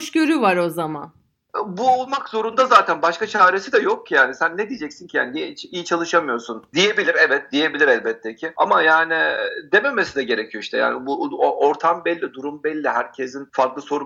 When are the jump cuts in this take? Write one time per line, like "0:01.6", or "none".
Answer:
none